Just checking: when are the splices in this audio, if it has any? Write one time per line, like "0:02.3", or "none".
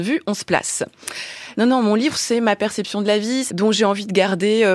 0:01.5
0:03.5